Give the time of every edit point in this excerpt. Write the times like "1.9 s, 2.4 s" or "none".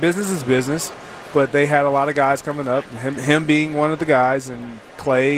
3.2 s